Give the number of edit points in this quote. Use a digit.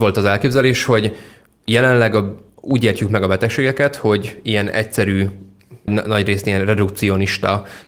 1